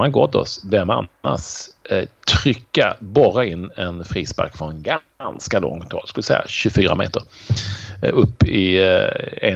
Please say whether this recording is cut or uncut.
uncut